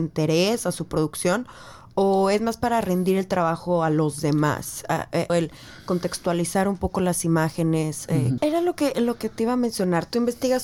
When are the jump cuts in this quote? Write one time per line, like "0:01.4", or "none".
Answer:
0:05.3
0:08.4